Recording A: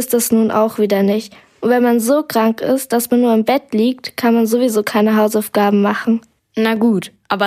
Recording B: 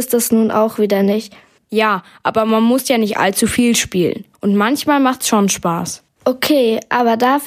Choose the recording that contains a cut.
B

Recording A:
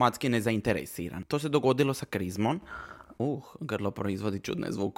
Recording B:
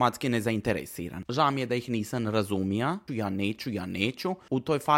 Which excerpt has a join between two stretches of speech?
B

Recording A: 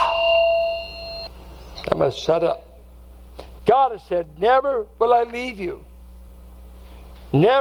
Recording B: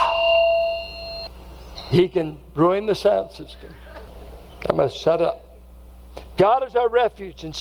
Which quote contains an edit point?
A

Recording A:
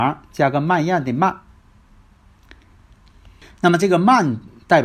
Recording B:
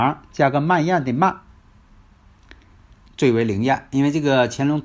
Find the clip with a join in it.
B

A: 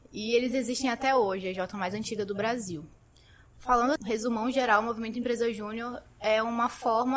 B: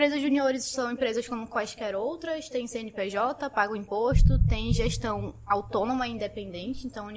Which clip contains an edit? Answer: A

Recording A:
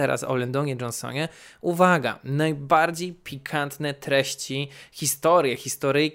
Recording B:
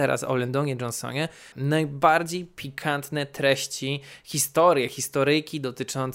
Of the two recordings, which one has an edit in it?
B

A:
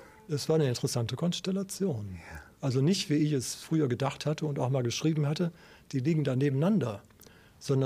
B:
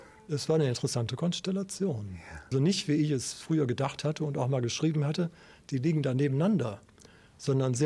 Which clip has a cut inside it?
B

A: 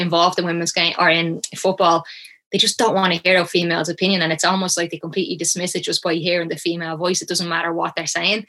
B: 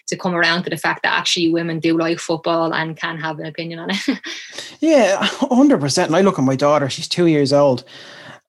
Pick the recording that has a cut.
B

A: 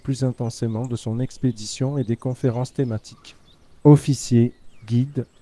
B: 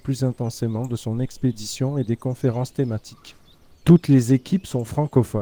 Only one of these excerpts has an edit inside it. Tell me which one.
B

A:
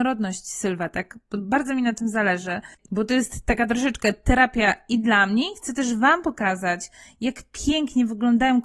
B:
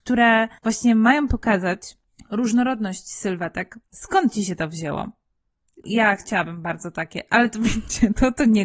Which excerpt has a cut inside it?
B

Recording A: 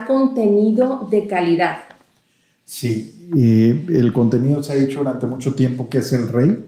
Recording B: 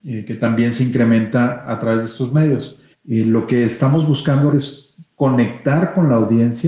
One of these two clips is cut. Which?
B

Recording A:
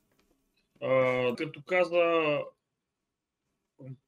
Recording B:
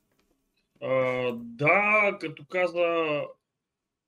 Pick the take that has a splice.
A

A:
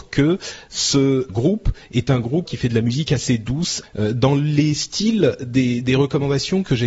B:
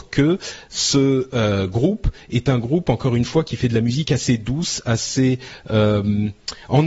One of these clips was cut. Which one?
A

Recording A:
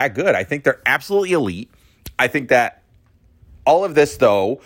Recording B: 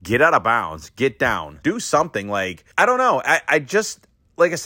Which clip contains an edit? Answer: B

